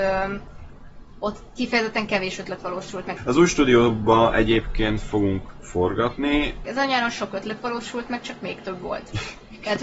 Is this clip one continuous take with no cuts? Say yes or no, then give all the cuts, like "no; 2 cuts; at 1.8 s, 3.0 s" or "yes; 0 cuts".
no; 2 cuts; at 3.2 s, 6.6 s